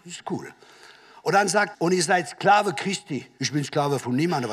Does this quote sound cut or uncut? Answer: cut